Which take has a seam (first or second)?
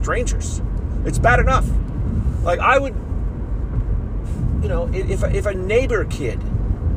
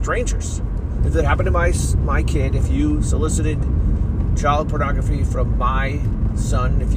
second